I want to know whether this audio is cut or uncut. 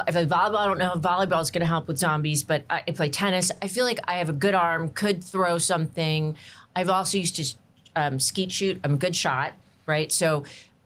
uncut